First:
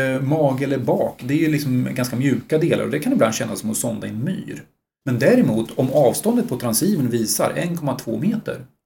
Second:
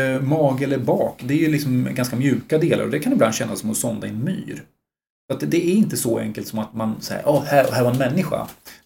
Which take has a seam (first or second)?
first